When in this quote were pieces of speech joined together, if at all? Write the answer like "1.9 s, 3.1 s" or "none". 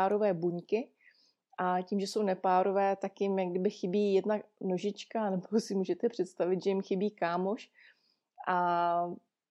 none